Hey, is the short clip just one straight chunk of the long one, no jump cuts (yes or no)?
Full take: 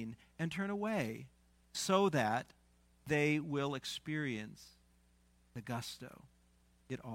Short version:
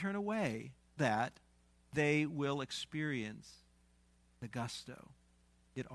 no